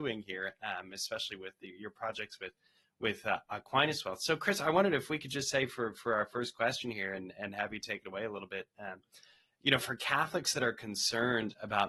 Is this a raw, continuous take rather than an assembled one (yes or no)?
yes